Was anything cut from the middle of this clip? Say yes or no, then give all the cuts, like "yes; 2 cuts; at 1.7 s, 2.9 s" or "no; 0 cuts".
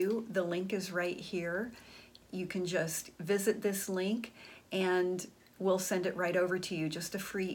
no; 0 cuts